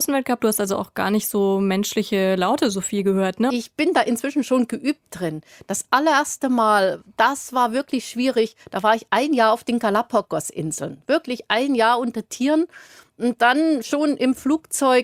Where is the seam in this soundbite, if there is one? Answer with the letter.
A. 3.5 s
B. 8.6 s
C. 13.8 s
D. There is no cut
A